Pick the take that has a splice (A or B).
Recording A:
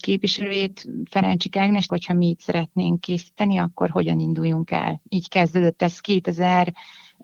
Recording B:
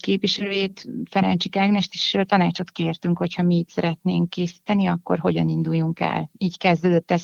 A